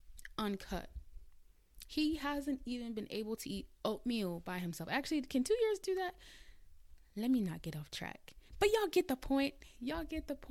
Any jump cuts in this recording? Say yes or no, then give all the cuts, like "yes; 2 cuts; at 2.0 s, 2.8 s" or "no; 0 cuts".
no; 0 cuts